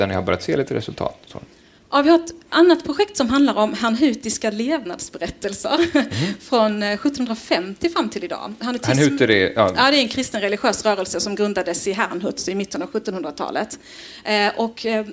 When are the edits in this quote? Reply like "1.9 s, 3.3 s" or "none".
none